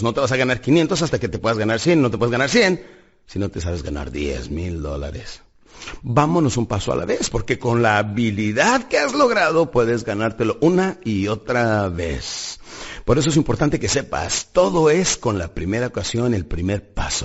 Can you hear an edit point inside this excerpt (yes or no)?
yes